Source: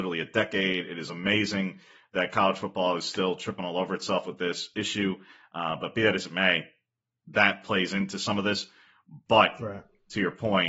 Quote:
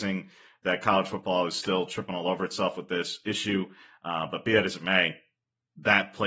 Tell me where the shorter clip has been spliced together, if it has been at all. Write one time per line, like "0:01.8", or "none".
none